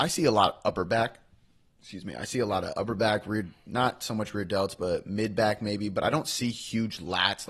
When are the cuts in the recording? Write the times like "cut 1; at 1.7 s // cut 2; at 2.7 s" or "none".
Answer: none